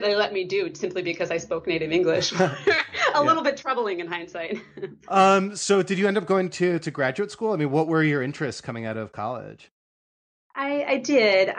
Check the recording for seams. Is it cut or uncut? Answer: uncut